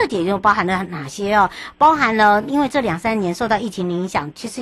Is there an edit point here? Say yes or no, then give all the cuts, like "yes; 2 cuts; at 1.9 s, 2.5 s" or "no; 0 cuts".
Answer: no; 0 cuts